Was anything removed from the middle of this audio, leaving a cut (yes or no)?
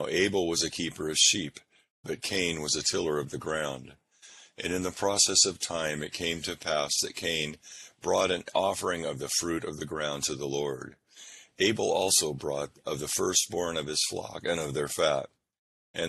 no